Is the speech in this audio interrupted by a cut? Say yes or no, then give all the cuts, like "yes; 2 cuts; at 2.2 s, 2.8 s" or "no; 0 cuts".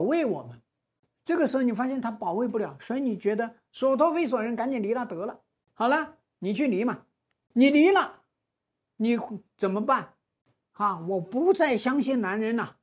no; 0 cuts